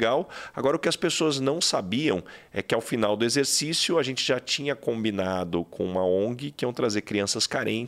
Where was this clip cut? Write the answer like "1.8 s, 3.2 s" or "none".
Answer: none